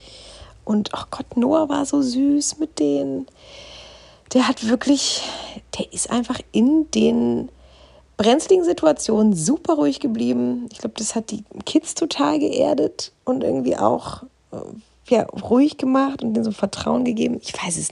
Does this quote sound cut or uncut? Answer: uncut